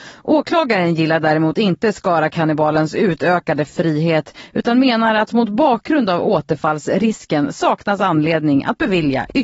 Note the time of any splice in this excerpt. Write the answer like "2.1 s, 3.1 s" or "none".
none